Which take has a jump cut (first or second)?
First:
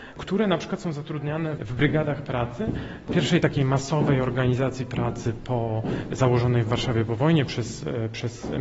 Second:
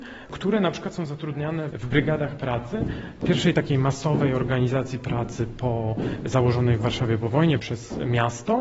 second